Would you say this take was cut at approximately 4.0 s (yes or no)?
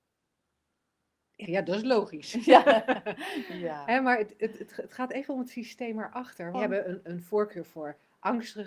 no